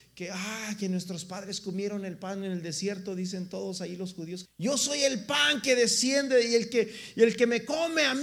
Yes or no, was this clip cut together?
yes